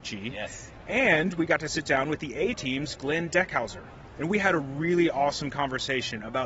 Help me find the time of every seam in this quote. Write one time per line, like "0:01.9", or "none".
none